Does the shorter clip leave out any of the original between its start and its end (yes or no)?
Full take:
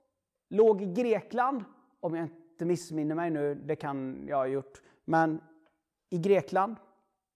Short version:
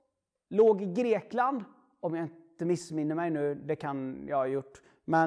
no